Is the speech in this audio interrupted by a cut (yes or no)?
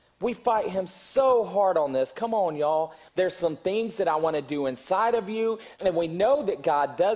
yes